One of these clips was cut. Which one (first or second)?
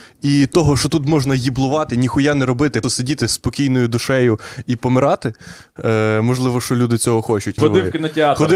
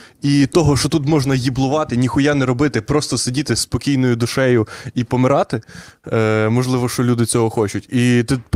first